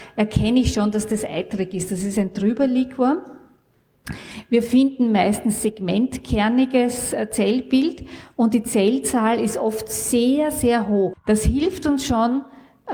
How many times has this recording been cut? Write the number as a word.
one